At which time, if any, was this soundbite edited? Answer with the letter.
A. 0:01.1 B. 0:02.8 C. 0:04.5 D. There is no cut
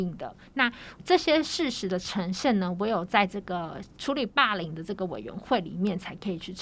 D